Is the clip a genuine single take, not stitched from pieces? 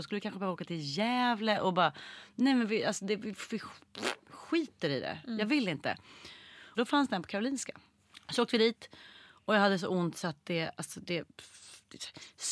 no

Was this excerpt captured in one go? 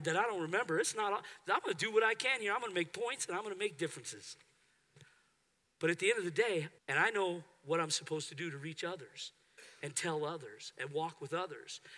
no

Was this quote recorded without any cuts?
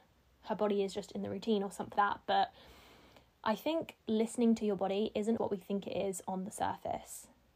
no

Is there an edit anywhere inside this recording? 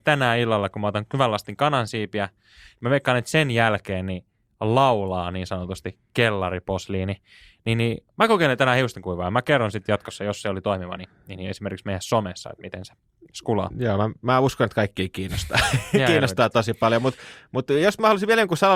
no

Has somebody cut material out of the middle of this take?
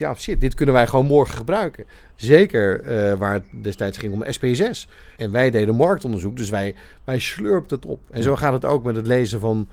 yes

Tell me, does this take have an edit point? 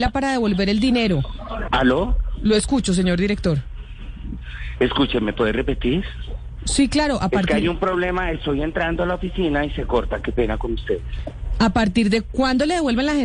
yes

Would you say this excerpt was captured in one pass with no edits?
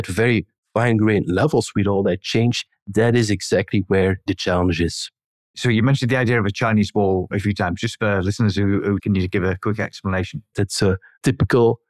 no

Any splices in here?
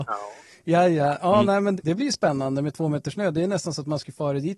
yes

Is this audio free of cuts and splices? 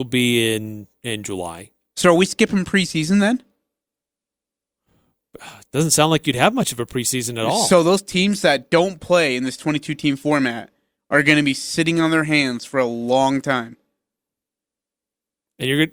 yes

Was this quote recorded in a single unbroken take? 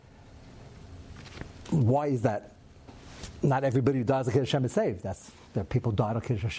yes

